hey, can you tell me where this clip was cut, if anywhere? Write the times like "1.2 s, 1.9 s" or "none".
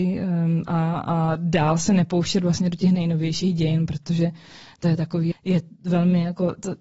5.3 s

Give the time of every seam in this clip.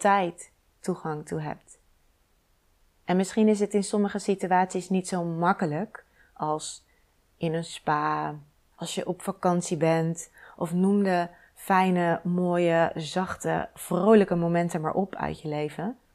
8.7 s

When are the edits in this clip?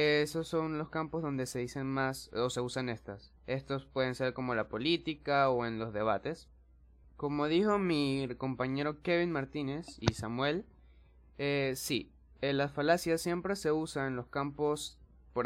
3.4 s, 7.0 s

